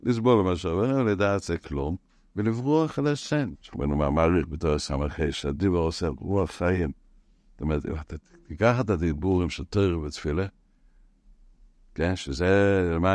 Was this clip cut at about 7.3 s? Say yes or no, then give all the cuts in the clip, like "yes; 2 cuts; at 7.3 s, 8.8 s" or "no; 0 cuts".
no; 1 cut; at 3.5 s